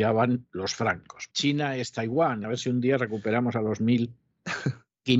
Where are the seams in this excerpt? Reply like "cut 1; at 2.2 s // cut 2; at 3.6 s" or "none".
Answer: cut 1; at 1.3 s // cut 2; at 2.4 s